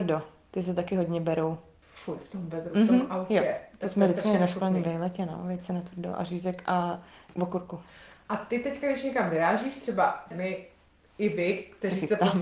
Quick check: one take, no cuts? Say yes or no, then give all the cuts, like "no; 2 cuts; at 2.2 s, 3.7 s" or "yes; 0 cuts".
no; 2 cuts; at 7.3 s, 10.3 s